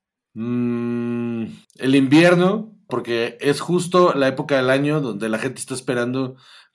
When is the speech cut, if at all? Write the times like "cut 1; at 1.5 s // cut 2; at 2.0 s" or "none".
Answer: cut 1; at 1.6 s // cut 2; at 2.9 s